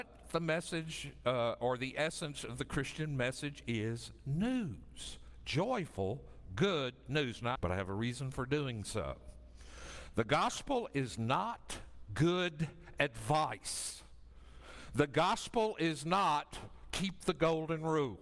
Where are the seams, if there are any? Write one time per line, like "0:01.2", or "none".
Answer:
0:07.6